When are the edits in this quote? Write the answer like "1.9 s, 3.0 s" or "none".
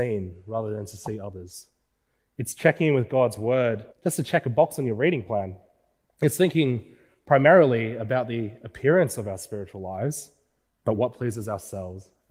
3.9 s, 10.7 s